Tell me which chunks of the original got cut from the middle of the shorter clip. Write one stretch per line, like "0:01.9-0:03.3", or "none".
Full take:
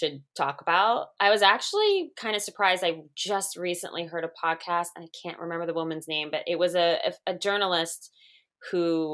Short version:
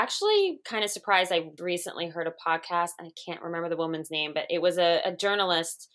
0:03.1-0:03.5
0:07.0-0:07.3